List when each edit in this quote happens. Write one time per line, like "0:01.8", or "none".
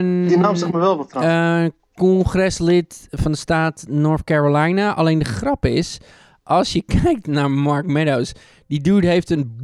none